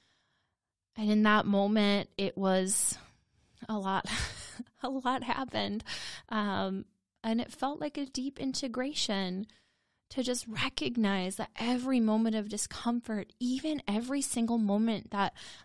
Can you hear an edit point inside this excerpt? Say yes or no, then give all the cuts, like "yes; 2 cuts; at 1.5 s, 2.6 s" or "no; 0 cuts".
no; 0 cuts